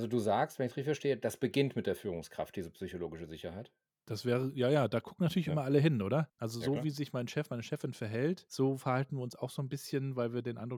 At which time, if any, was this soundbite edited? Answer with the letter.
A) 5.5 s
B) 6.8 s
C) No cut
C